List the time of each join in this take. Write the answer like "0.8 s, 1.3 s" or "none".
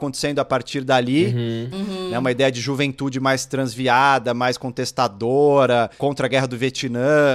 1.7 s